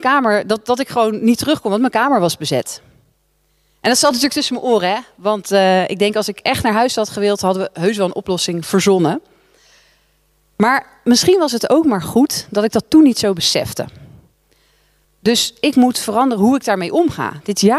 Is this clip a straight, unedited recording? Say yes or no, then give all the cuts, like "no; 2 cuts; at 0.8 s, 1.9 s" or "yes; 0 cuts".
no; 1 cut; at 15.0 s